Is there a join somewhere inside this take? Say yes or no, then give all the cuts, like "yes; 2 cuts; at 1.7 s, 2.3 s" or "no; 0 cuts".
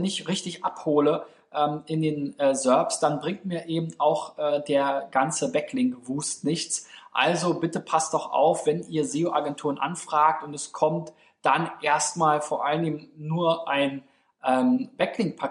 no; 0 cuts